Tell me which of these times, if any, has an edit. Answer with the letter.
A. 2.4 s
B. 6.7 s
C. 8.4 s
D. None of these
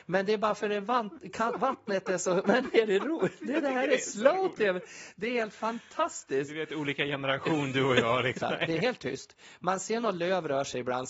C